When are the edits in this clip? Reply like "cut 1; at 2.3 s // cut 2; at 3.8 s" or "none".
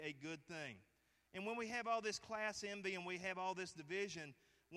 none